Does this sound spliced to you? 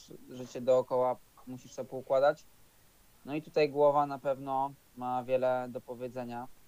no; 0 cuts

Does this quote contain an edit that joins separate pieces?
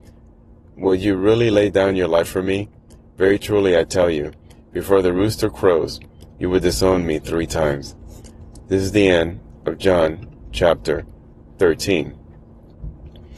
no; 0 cuts

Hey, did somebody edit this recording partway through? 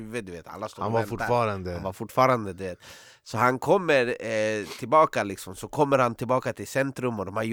no; 0 cuts

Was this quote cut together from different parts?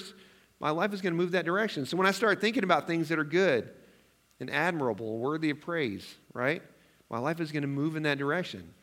no; 0 cuts

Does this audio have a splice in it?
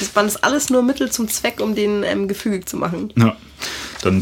no; 0 cuts

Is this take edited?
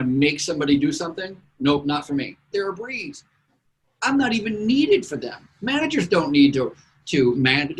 yes; 1 cut; at 2.5 s

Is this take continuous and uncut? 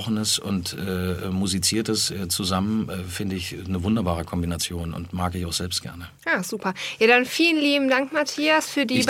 yes; 0 cuts

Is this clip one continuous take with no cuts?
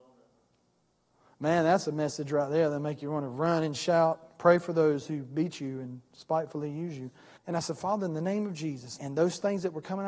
no; 2 cuts; at 7.4 s, 9.0 s

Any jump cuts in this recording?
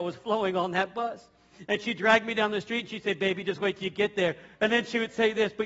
yes; 1 cut; at 4.5 s

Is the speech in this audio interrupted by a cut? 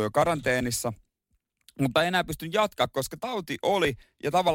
no; 0 cuts

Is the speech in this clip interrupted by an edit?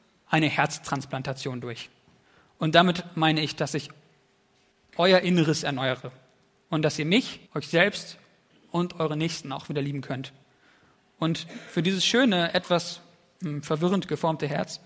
yes; 1 cut; at 7.5 s

